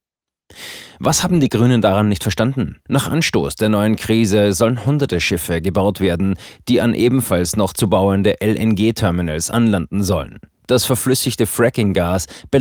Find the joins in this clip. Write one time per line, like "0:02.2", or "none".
0:02.9